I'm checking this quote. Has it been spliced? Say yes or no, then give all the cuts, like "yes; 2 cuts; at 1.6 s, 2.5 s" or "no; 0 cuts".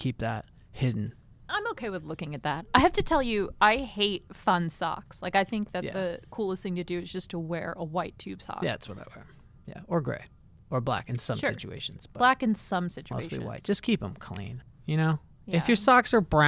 no; 0 cuts